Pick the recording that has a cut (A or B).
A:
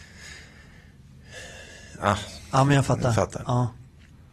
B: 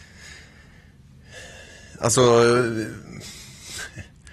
A